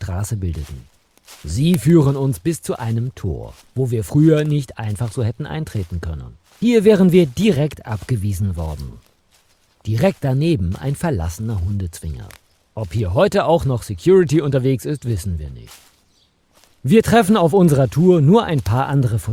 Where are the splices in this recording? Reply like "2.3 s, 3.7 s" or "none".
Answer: none